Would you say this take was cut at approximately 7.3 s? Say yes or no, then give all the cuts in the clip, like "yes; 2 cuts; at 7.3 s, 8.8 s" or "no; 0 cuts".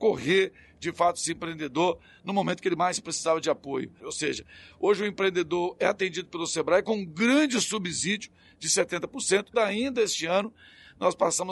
no; 2 cuts; at 4.0 s, 9.5 s